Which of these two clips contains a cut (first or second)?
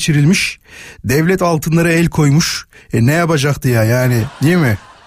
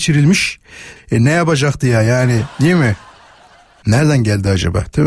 second